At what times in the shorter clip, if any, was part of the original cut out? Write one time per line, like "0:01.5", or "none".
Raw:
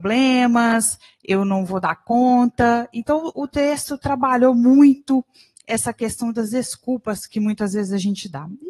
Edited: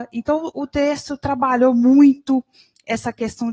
none